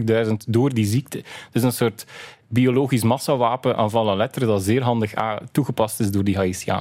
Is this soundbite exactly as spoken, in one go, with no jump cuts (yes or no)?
yes